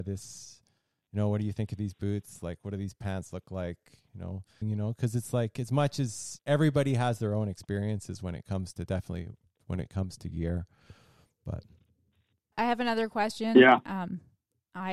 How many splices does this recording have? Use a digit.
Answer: 3